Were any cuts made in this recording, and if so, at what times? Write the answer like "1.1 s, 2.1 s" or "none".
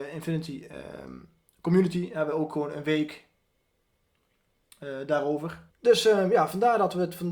5.7 s

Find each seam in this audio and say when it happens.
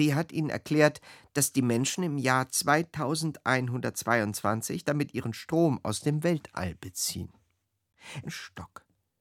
8.2 s

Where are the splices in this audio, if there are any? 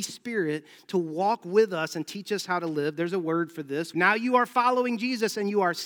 3.9 s

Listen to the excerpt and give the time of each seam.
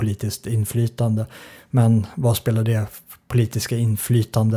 none

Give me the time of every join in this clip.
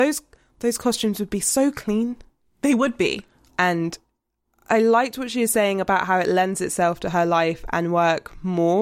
3.5 s

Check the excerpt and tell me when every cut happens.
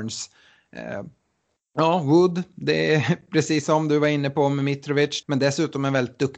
5.2 s

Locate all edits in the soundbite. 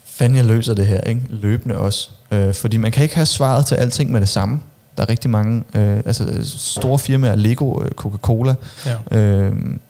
none

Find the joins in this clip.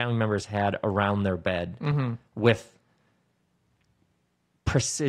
none

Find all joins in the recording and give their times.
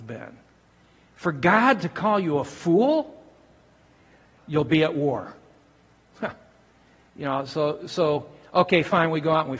4.4 s

